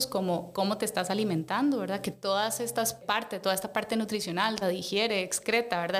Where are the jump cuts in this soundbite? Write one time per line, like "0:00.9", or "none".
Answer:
0:03.0
0:04.6